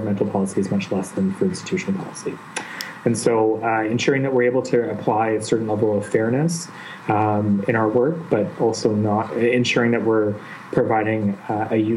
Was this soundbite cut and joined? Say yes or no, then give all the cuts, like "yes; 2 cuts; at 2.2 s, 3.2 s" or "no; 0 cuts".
no; 0 cuts